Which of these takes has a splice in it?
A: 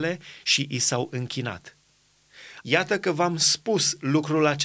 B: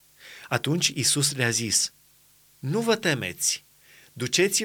A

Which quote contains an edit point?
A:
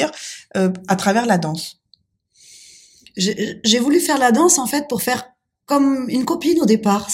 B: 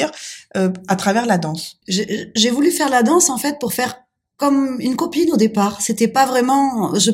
B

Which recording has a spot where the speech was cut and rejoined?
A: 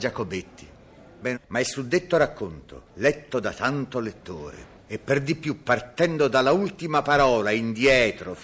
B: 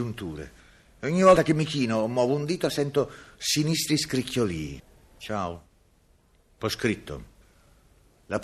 A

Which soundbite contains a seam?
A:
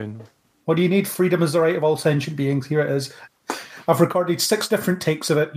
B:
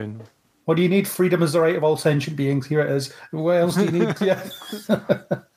A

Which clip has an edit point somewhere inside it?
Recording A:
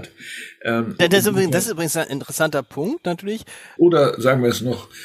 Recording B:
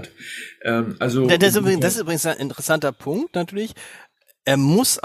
A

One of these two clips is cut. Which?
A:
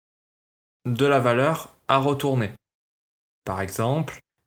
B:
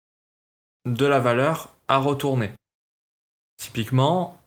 A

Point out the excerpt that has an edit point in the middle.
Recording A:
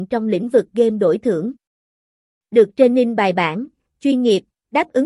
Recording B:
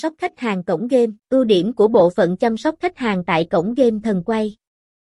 B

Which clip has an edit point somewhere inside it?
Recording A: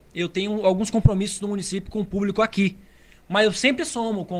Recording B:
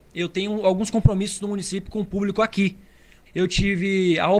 B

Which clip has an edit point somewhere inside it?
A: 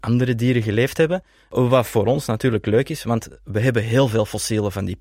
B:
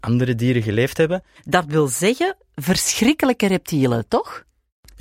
B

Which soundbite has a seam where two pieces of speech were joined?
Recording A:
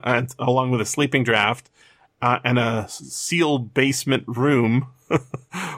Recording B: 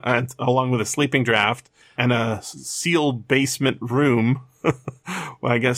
B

